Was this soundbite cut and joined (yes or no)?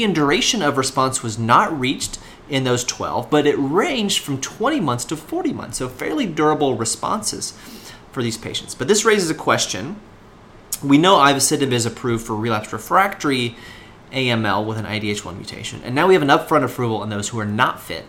no